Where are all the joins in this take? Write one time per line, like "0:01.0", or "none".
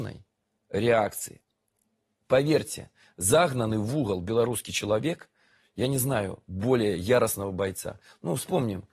none